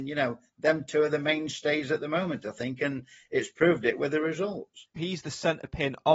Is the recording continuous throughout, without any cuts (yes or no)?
no